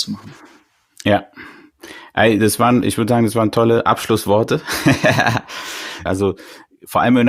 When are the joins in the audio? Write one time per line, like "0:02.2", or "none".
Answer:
0:02.8
0:06.1